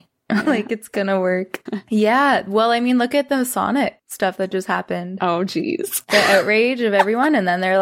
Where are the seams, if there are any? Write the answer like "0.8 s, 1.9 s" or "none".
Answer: 1.7 s